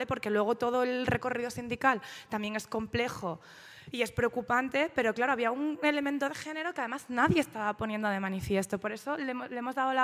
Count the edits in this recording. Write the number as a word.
zero